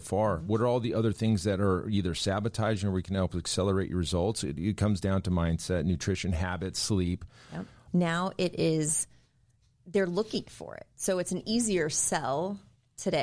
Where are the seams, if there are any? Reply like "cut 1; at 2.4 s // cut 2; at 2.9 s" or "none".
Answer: cut 1; at 7.9 s